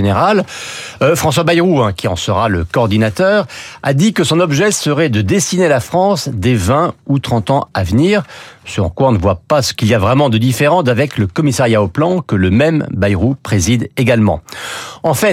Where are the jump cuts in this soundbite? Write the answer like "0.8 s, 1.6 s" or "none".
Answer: none